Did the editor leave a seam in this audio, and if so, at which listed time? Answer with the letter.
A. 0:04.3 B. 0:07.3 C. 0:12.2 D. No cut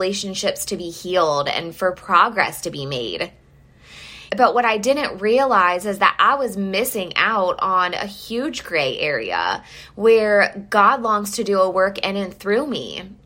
A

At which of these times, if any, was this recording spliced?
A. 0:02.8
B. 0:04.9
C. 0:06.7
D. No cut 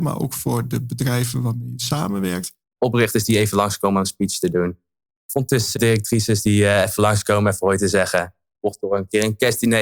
A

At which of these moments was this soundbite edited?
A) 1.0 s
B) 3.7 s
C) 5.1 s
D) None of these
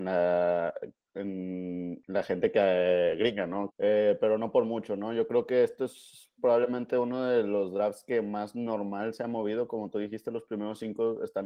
B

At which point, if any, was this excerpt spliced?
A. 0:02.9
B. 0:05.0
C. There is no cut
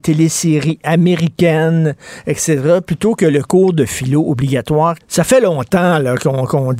B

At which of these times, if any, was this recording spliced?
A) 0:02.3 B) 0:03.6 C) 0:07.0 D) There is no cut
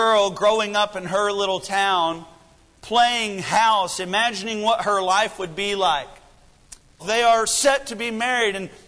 C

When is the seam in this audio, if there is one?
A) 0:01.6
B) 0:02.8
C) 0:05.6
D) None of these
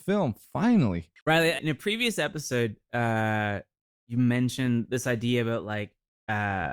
A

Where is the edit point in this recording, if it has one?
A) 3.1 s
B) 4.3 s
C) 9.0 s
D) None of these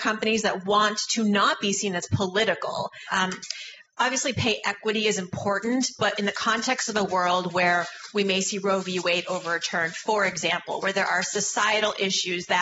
A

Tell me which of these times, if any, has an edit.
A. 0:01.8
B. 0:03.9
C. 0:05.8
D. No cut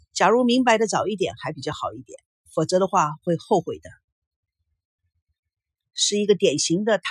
C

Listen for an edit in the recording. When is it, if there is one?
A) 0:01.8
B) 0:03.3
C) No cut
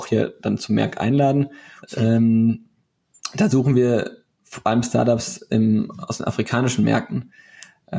A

